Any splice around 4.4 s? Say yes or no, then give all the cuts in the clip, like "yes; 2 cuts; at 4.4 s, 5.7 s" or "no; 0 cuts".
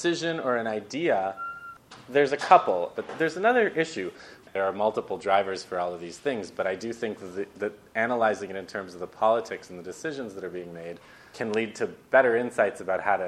yes; 2 cuts; at 2.9 s, 4.4 s